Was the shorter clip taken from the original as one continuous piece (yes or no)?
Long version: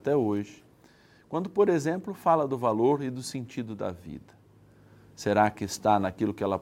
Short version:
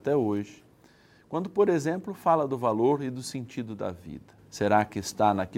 no